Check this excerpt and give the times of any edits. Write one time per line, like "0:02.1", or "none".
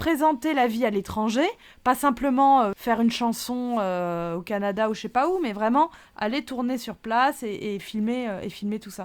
none